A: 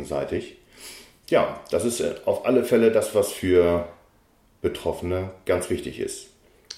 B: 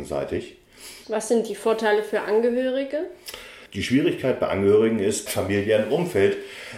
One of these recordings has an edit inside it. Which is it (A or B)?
B